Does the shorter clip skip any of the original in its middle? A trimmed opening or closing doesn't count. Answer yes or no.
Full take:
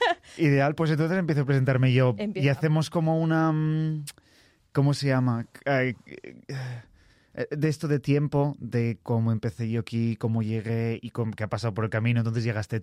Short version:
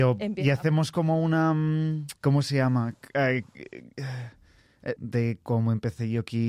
yes